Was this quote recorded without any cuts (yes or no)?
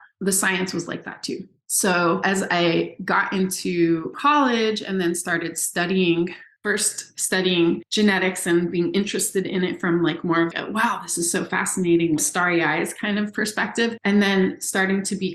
yes